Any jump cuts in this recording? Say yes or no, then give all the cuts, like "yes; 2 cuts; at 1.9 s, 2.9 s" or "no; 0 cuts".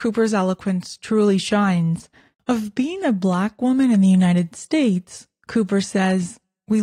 yes; 1 cut; at 2.3 s